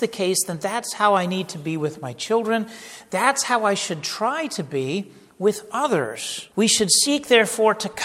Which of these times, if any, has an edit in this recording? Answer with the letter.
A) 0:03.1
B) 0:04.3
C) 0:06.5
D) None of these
C